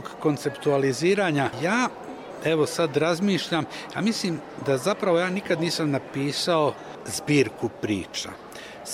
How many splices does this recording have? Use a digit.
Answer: 0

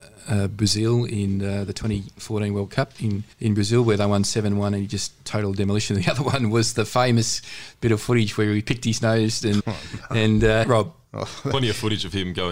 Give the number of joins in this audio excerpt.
3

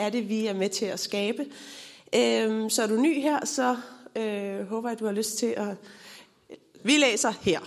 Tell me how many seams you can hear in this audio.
1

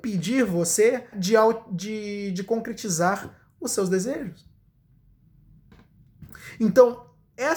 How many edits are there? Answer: 1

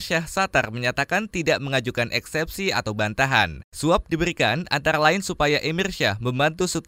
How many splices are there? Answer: 1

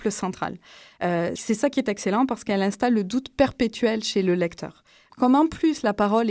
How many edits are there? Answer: 2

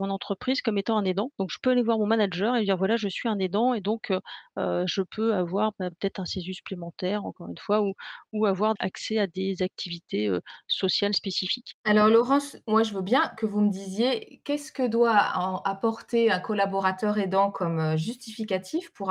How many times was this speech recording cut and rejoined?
0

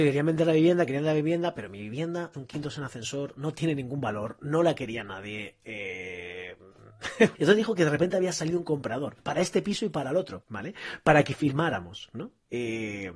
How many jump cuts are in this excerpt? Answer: 3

